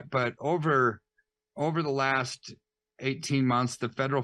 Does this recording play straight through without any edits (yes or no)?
yes